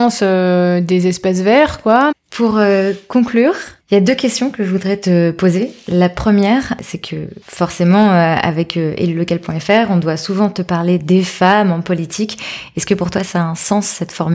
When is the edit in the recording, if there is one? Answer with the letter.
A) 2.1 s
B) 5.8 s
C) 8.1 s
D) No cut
A